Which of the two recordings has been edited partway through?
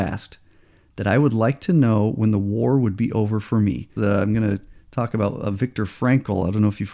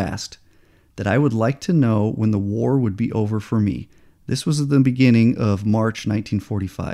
first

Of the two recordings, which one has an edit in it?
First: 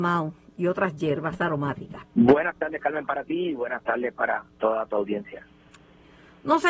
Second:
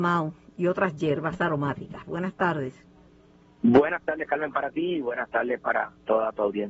first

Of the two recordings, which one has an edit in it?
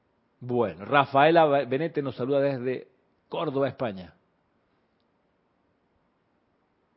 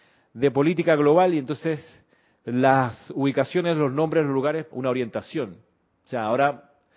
second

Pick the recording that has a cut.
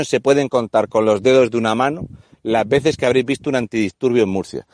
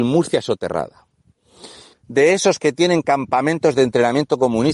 second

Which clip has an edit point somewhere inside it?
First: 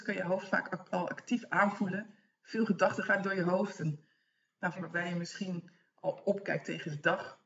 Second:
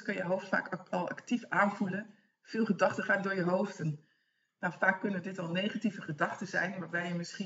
first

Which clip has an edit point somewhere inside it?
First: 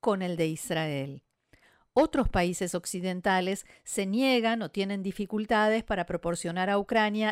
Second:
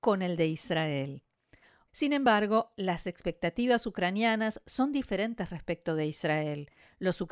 second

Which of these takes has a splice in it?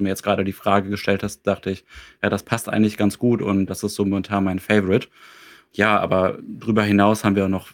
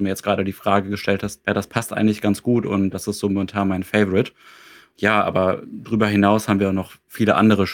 second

